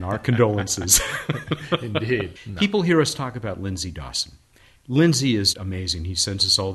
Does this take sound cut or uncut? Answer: cut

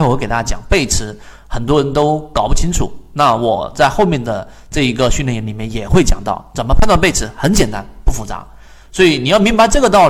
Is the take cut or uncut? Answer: uncut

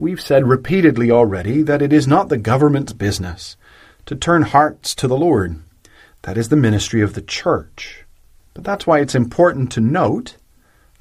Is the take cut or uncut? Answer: uncut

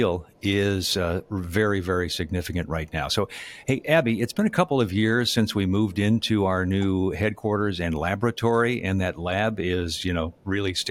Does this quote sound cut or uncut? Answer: uncut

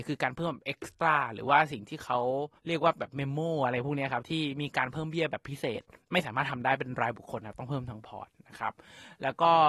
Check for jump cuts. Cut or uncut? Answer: cut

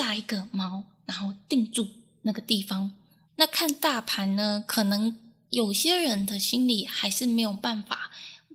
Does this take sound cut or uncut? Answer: cut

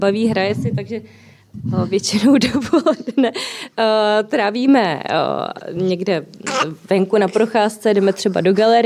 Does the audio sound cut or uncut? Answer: uncut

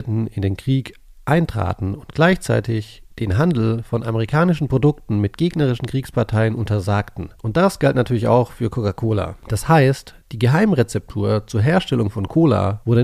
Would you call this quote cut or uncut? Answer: uncut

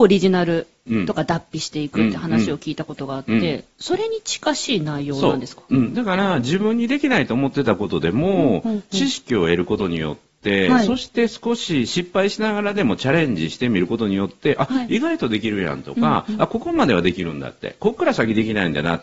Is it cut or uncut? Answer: uncut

